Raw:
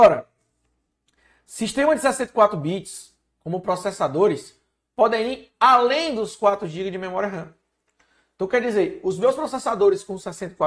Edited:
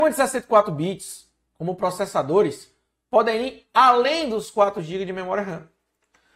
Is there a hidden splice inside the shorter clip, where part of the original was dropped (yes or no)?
no